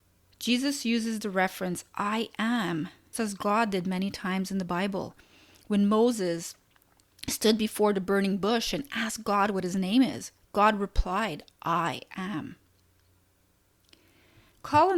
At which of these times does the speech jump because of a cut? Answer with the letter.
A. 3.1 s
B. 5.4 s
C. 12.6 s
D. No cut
A